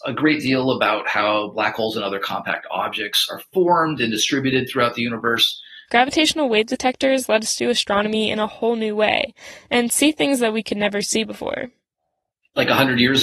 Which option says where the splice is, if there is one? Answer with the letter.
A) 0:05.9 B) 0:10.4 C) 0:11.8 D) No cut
A